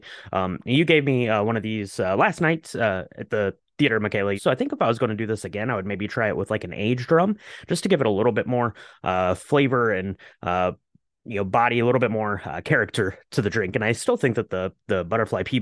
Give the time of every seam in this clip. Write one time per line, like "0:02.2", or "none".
0:04.4